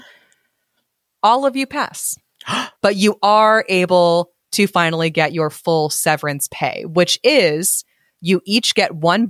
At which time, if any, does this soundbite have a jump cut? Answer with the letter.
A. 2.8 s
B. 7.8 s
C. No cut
A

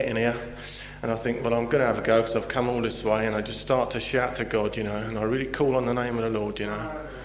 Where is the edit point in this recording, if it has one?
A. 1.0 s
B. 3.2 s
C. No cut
C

